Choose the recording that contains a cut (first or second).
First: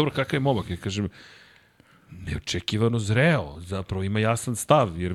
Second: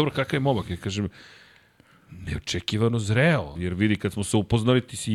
second